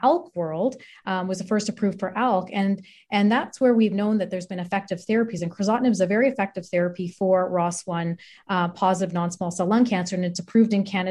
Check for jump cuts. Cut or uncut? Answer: uncut